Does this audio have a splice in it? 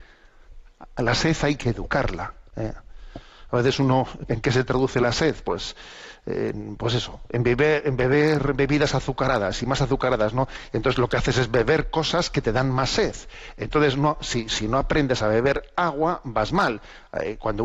yes; 2 cuts; at 2.5 s, 4.3 s

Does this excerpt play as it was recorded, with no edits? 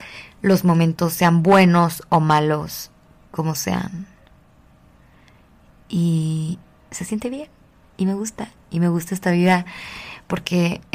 yes; 0 cuts

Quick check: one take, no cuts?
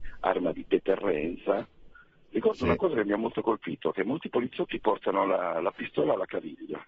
yes; 0 cuts

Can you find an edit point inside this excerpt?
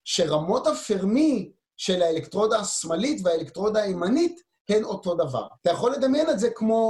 yes; 1 cut; at 5.5 s

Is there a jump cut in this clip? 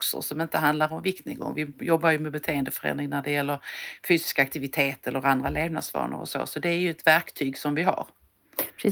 no; 0 cuts

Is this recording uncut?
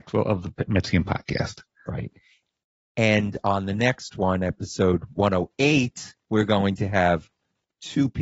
no; 1 cut; at 6.2 s

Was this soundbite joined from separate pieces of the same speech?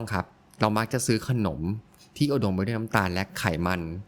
no; 0 cuts

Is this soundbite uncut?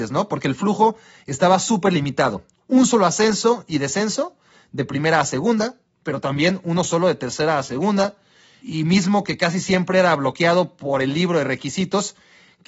yes; 0 cuts

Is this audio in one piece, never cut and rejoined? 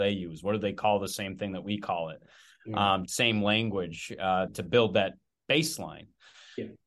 no; 2 cuts; at 3.1 s, 4.5 s

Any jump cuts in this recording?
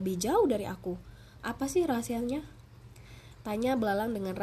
yes; 1 cut; at 1.4 s

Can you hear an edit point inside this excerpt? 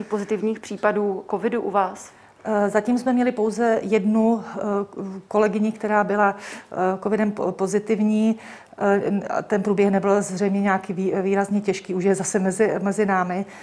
no; 0 cuts

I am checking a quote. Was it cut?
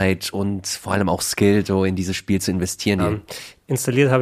yes; 1 cut; at 3.0 s

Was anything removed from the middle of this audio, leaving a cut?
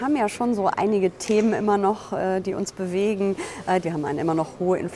yes; 1 cut; at 3.8 s

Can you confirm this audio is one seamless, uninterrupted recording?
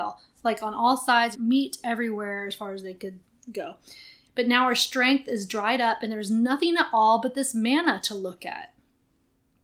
no; 2 cuts; at 1.3 s, 4.3 s

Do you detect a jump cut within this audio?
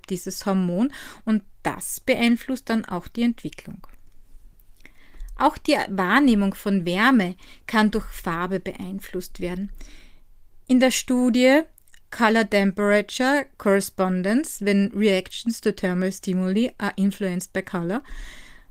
no; 0 cuts

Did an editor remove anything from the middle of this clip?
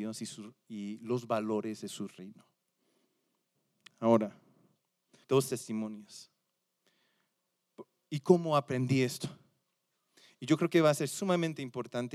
yes; 1 cut; at 5.2 s

